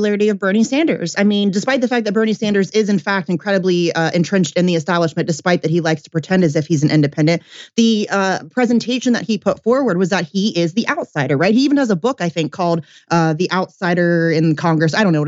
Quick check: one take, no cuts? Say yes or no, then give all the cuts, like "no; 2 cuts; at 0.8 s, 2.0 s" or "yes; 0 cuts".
yes; 0 cuts